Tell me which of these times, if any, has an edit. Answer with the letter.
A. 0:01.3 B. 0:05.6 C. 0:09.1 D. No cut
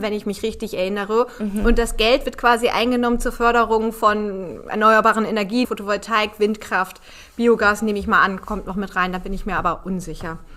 B